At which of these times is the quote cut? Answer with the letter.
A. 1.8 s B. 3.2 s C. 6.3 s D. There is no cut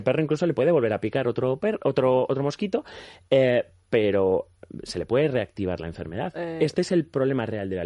C